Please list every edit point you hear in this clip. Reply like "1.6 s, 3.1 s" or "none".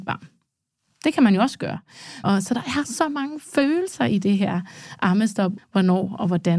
2.2 s, 5.6 s